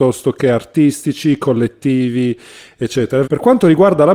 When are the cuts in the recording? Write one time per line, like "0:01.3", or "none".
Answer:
0:03.2